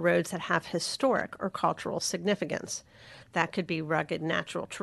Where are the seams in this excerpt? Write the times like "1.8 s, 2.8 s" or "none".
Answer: 3.2 s